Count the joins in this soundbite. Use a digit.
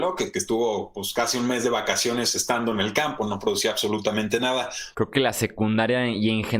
1